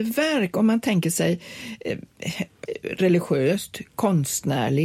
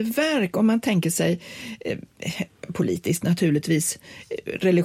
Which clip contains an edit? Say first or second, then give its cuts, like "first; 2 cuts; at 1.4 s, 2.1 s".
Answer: first; 1 cut; at 2.7 s